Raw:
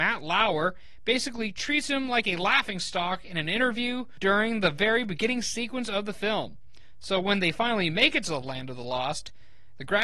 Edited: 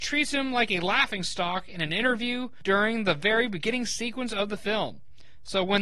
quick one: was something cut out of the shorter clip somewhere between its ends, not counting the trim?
no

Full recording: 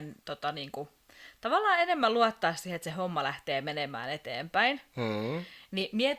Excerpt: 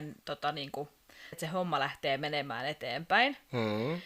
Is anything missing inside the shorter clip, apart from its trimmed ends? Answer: yes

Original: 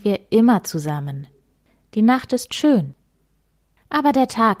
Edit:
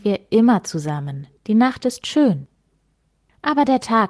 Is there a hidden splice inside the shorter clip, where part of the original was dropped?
yes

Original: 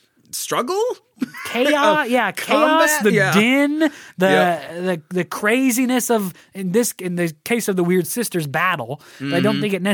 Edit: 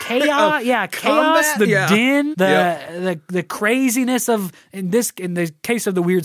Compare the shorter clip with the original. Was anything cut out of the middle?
yes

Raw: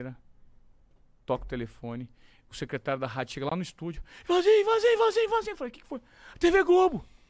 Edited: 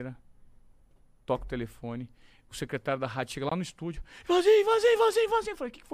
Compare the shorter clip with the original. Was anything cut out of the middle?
no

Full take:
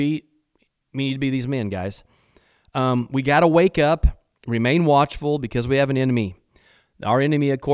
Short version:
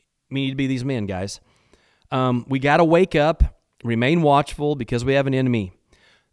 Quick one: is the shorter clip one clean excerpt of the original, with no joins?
yes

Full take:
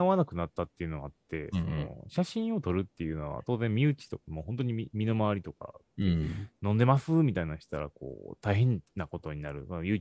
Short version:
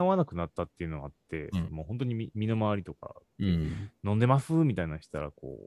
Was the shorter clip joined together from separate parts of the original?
yes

